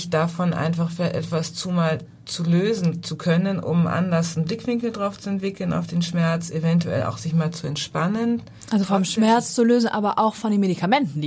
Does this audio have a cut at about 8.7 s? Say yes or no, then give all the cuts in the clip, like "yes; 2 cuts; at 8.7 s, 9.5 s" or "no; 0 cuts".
no; 0 cuts